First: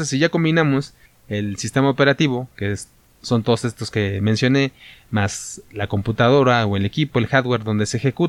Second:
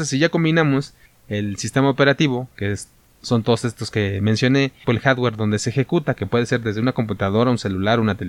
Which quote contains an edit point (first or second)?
second